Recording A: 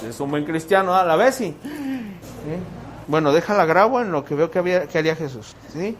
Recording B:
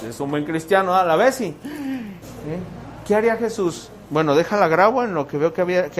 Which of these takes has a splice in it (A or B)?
A